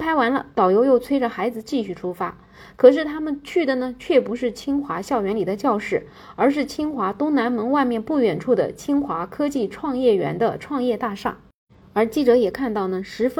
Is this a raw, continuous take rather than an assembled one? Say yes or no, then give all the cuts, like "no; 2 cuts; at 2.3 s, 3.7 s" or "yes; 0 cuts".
yes; 0 cuts